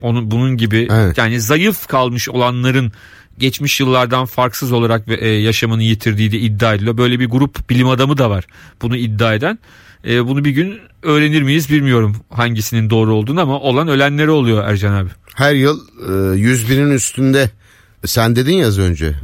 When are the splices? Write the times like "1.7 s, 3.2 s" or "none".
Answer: none